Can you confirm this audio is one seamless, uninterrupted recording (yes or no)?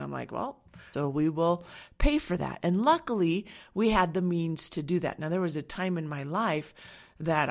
no